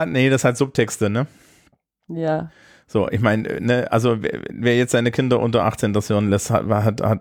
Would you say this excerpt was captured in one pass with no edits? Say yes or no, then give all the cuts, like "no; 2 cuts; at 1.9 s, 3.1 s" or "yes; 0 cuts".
yes; 0 cuts